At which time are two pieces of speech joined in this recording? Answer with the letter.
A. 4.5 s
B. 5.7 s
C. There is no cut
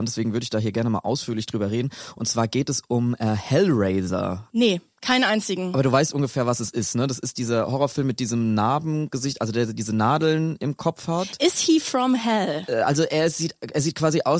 A